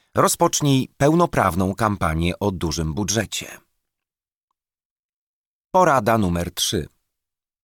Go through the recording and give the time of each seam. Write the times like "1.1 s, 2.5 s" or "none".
none